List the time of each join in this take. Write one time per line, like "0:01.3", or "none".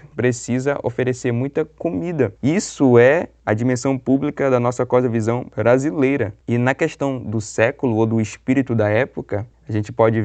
none